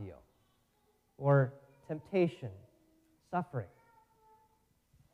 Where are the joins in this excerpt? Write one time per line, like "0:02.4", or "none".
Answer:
0:01.1
0:03.2

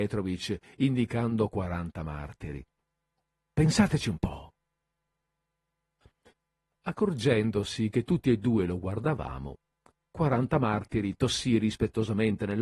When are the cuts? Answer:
none

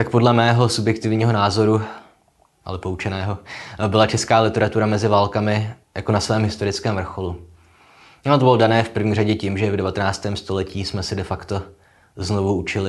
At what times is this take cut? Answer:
none

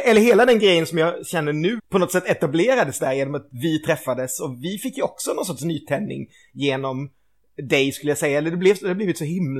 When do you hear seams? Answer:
0:01.8

